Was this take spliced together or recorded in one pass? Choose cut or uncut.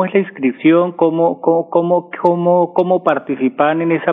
uncut